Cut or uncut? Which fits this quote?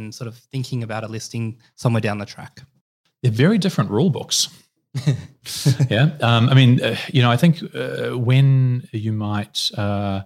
uncut